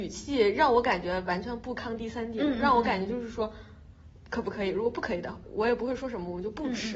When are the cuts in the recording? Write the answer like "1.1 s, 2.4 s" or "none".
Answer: 5.4 s